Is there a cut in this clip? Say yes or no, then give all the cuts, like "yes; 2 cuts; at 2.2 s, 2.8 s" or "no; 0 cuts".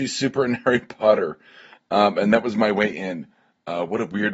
no; 0 cuts